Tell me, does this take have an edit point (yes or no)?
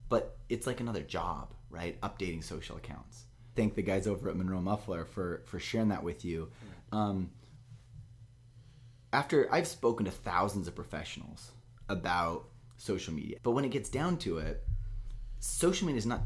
yes